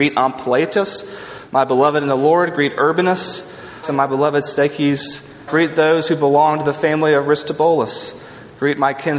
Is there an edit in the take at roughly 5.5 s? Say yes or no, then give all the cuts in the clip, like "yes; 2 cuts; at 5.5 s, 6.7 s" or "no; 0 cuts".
yes; 2 cuts; at 3.8 s, 5.5 s